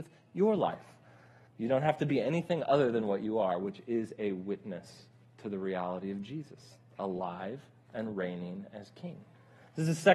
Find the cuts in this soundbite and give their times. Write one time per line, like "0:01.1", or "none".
0:01.5